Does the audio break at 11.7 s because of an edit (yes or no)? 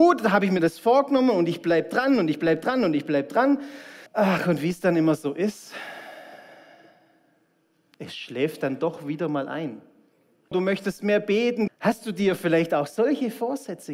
yes